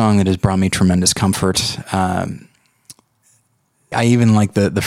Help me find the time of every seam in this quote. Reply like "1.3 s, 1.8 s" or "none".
3.9 s